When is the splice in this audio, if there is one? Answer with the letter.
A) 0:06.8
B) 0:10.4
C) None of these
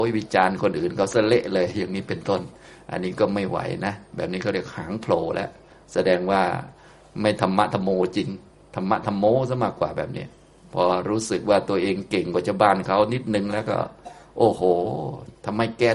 C